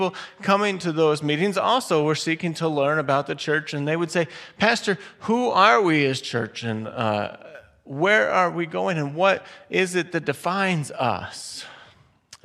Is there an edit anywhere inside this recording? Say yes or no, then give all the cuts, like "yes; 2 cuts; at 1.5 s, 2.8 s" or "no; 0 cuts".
no; 0 cuts